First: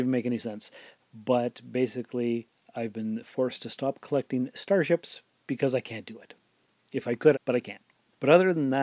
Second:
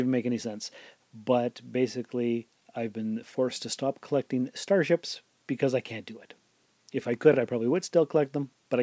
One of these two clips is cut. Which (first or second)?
first